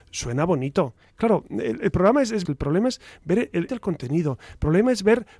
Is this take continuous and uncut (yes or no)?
no